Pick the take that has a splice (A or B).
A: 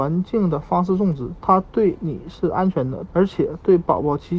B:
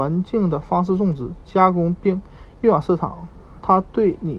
A